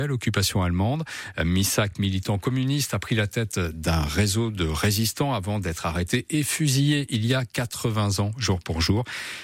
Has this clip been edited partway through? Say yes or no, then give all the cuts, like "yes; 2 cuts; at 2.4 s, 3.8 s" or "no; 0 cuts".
no; 0 cuts